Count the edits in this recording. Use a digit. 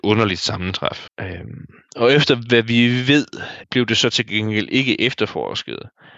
2